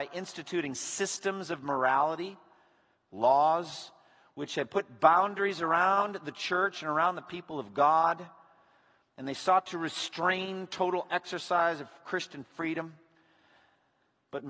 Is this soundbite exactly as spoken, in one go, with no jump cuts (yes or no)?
yes